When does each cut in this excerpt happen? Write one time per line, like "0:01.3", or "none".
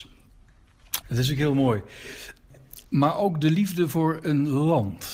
0:01.0
0:02.8